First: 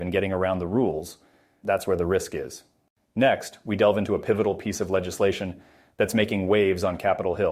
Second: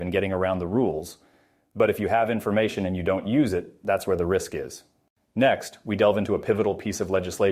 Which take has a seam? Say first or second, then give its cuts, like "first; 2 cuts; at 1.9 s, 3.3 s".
first; 1 cut; at 1.6 s